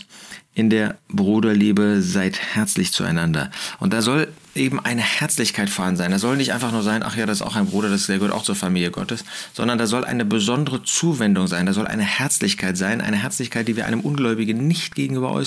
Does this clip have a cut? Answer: no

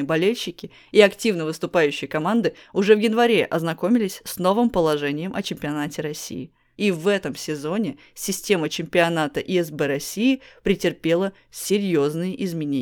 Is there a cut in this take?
yes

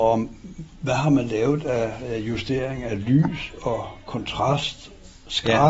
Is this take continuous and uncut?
yes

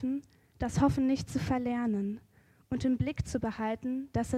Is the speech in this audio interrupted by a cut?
no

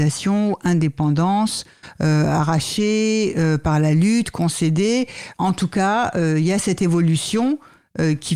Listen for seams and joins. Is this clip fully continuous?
yes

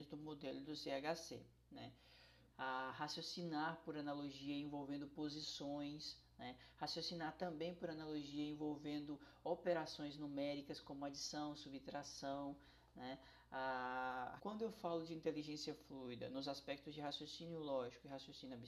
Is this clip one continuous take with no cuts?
no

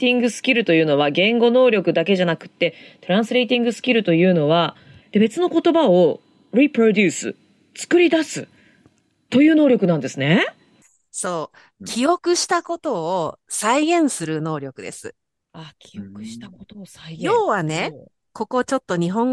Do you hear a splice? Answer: yes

